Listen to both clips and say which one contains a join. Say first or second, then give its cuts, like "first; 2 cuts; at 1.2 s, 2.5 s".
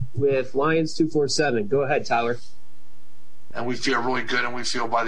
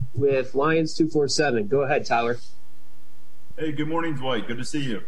first; 1 cut; at 3.5 s